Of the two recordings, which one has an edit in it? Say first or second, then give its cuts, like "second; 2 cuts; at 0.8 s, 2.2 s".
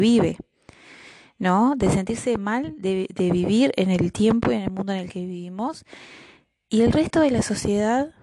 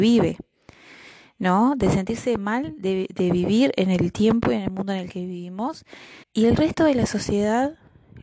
second; 1 cut; at 6.2 s